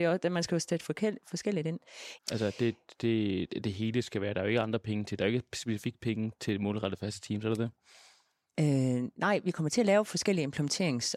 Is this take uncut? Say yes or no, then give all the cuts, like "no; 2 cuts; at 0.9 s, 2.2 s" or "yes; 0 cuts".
no; 1 cut; at 2.2 s